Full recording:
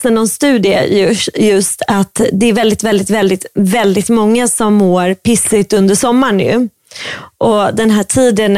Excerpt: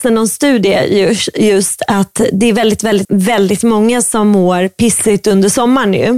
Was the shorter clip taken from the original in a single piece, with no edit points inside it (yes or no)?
no